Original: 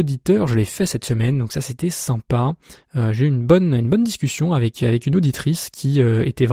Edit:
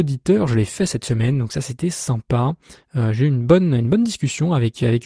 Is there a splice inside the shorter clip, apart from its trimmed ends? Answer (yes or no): no